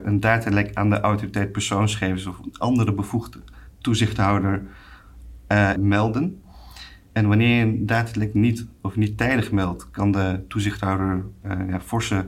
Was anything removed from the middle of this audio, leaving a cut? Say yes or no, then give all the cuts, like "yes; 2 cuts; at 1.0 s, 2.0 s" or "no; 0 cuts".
yes; 1 cut; at 5.7 s